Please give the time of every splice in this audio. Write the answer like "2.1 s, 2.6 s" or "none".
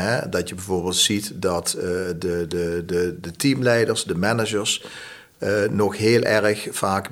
none